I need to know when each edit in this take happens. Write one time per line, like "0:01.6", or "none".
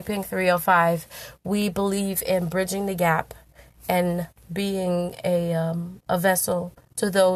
none